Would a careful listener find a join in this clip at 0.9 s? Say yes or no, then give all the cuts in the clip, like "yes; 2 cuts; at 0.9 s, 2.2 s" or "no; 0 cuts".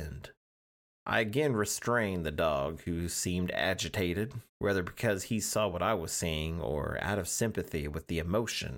no; 1 cut; at 4.5 s